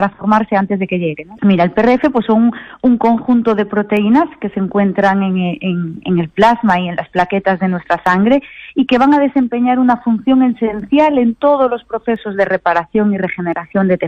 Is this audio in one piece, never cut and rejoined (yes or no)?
no